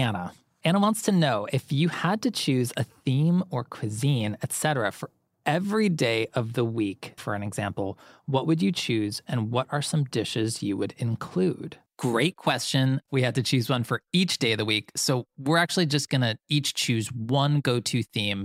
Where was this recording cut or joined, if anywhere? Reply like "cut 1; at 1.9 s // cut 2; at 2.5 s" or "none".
cut 1; at 7.2 s // cut 2; at 11.9 s // cut 3; at 13.1 s